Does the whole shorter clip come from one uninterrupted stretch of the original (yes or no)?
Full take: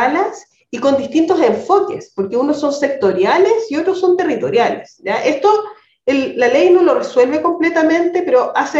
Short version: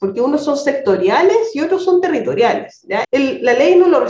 no